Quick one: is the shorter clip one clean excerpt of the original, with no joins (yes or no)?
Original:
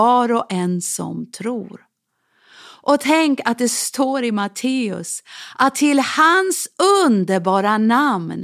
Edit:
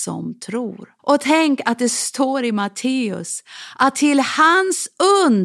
no